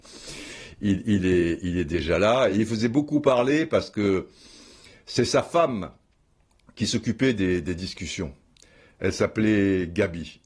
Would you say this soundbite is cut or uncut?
uncut